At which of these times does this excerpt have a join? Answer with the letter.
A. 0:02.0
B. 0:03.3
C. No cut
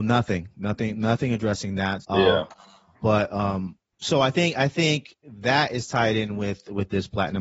A